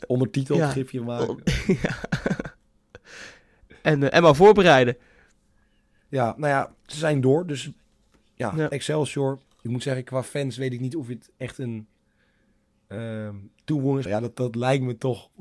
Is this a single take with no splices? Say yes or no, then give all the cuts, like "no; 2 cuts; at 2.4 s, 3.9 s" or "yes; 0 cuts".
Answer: no; 1 cut; at 14.1 s